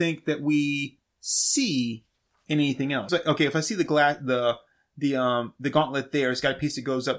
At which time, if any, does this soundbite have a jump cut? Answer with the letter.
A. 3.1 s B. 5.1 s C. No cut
A